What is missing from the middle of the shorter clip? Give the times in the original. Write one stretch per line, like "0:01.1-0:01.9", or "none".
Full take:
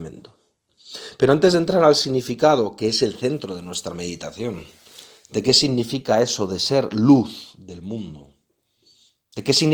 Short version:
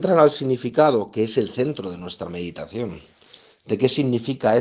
none